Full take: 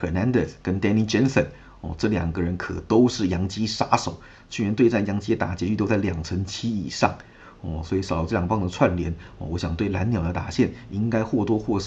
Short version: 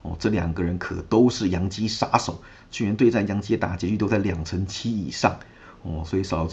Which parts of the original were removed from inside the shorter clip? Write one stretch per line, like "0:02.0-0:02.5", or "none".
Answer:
none